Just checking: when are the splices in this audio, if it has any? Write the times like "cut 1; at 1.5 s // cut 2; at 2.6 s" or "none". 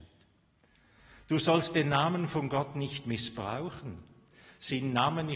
none

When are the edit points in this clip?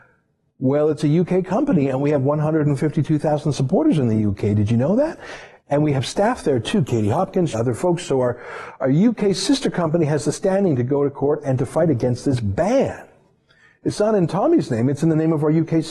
cut 1; at 7.5 s

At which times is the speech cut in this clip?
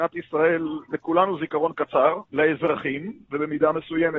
cut 1; at 2.3 s

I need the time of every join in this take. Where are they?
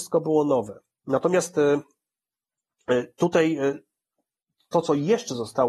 none

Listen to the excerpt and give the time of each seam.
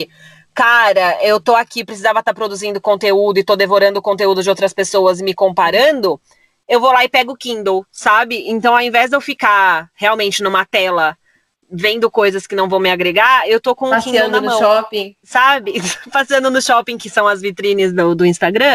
none

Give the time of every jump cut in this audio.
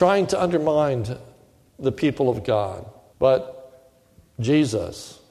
cut 1; at 3.1 s

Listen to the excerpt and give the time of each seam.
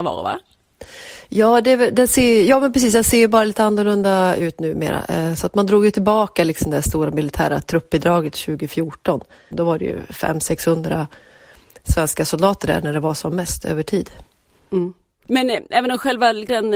cut 1; at 9.5 s

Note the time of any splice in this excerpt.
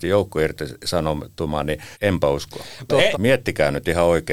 cut 1; at 1.9 s // cut 2; at 3.1 s

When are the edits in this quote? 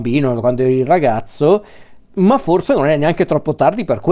cut 1; at 2.1 s

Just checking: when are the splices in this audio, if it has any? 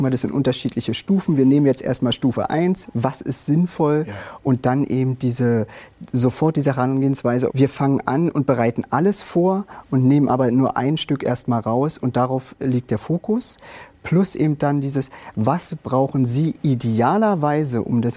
cut 1; at 2.9 s // cut 2; at 7.5 s

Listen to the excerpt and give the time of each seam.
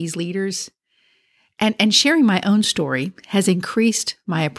none

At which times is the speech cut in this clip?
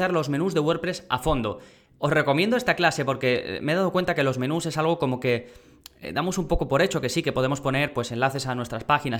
none

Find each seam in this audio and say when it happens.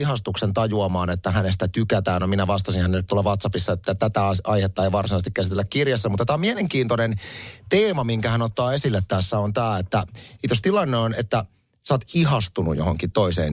none

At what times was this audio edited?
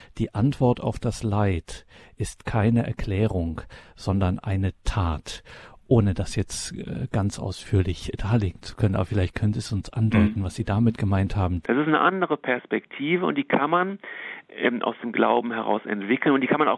cut 1; at 11.6 s

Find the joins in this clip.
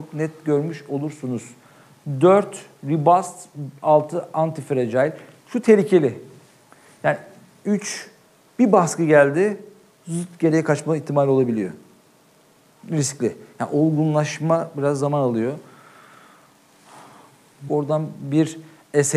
cut 1; at 12.8 s // cut 2; at 17.7 s

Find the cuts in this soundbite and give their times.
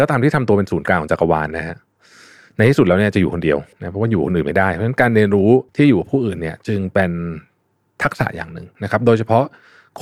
cut 1; at 3.7 s // cut 2; at 5.7 s

